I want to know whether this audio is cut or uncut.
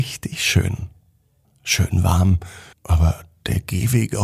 cut